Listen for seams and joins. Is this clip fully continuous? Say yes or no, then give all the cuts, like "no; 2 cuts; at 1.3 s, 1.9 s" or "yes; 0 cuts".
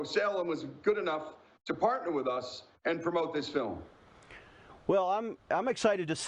yes; 0 cuts